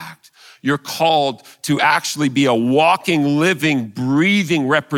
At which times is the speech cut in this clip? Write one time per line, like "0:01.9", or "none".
none